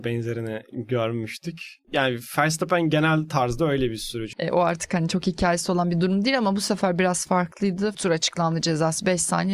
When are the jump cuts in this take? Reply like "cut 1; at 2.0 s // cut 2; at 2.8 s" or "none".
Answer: cut 1; at 1.8 s // cut 2; at 4.3 s // cut 3; at 7.9 s